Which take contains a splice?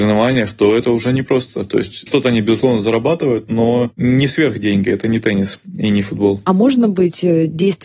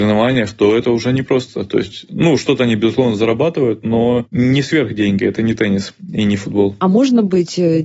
first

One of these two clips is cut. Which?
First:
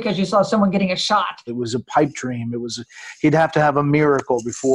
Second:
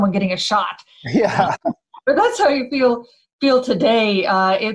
first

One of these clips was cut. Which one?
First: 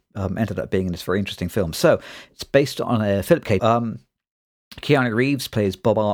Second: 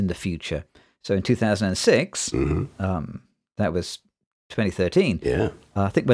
first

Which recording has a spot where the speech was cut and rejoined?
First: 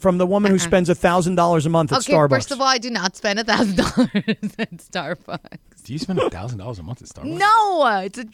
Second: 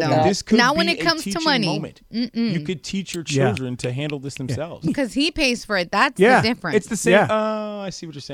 second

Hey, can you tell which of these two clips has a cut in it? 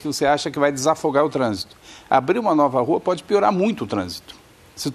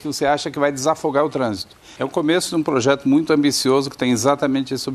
second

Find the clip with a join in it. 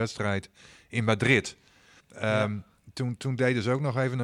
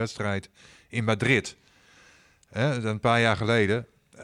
first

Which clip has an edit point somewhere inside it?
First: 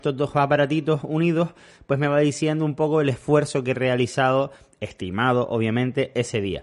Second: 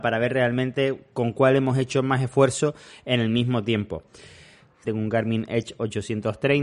second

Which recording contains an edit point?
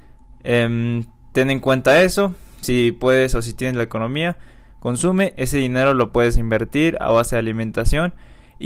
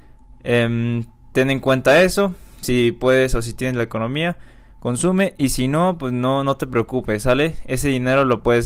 first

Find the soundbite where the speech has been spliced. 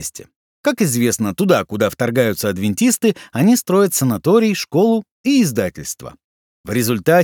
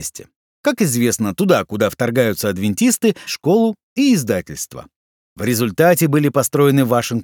second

